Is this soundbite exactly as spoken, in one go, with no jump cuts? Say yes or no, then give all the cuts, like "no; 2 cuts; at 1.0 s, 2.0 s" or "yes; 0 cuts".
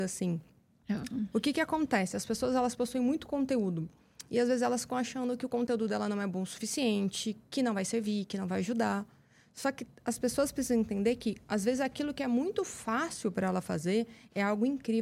no; 1 cut; at 1.3 s